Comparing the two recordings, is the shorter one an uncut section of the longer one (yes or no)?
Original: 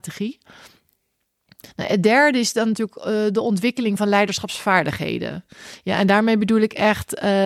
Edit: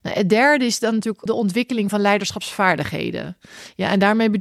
no